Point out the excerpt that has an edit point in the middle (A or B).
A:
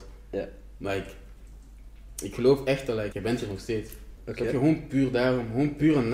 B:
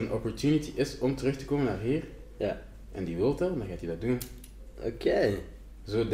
A